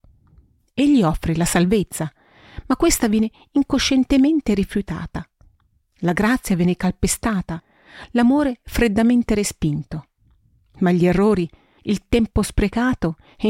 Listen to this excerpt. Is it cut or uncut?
cut